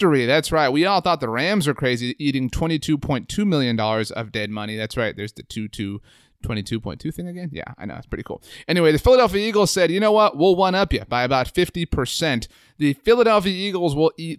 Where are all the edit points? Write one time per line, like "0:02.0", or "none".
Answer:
none